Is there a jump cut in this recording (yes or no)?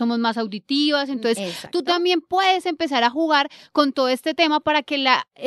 no